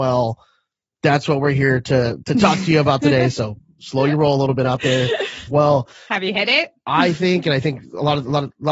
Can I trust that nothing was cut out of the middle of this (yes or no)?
no